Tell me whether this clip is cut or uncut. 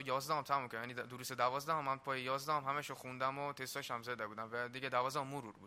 uncut